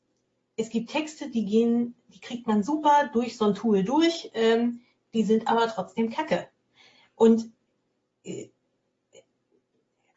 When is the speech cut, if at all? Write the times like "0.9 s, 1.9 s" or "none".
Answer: none